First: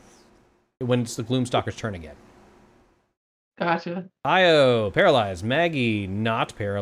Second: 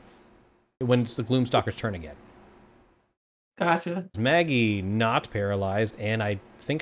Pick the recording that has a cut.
second; 1 cut; at 4.1 s

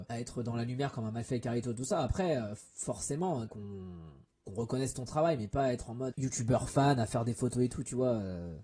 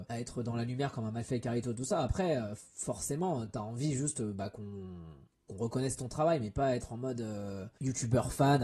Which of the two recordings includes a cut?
first; 2 cuts; at 3.5 s, 6.1 s

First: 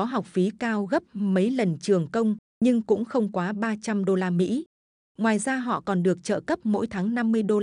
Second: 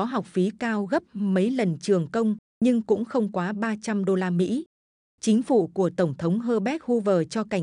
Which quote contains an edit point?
second; 1 cut; at 5.1 s

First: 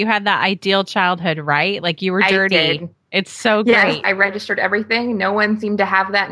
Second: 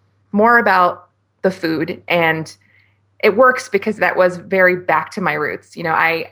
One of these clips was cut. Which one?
first; 1 cut; at 4.0 s

